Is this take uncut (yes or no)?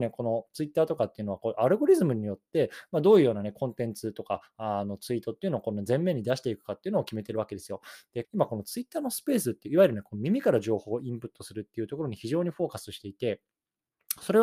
no